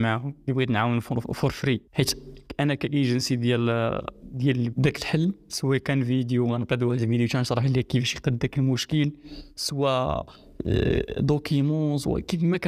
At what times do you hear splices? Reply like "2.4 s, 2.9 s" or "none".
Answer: 4.7 s